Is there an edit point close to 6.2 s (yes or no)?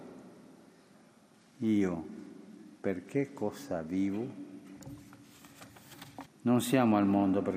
yes